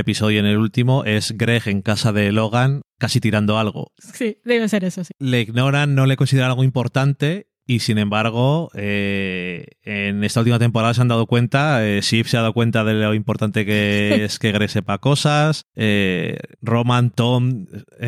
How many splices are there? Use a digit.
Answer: 1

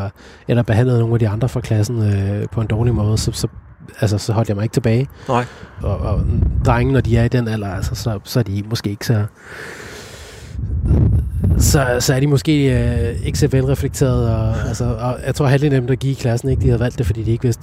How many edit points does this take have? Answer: 1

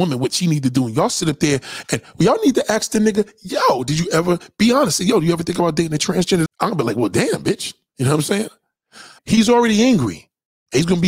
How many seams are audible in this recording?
2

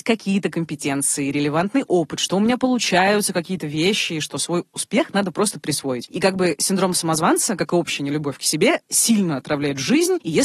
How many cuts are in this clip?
0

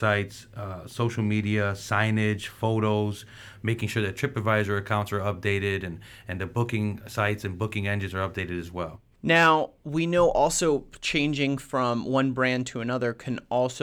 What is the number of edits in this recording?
1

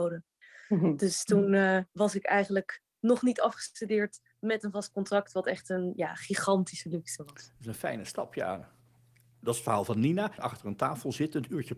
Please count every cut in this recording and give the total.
1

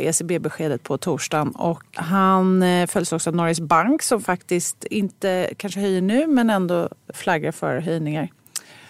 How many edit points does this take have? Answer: 2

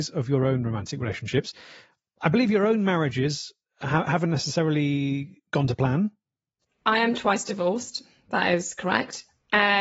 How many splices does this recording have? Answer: 0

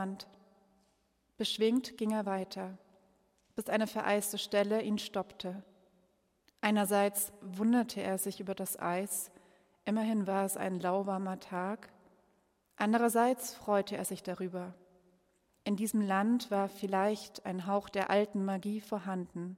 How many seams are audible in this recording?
0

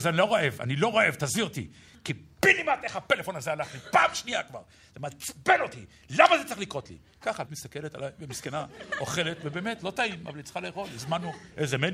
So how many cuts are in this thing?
1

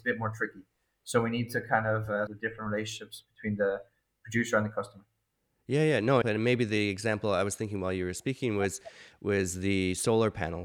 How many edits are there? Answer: 2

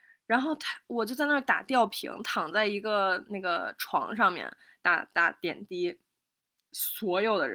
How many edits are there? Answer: 0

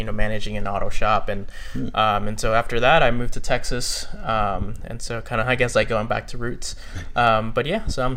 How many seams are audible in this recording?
0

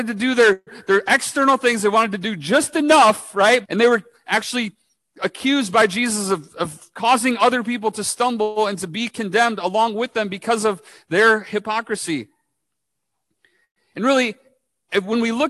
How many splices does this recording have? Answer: 1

